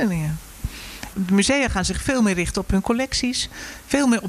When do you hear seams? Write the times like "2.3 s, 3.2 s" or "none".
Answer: 1.1 s